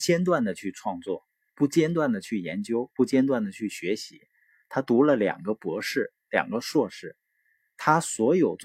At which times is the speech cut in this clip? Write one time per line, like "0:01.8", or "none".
none